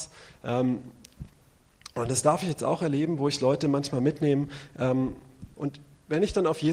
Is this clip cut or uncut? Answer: cut